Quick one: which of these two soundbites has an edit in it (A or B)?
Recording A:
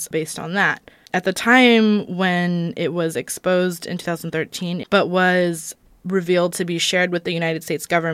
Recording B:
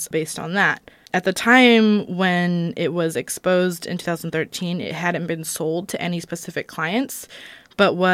A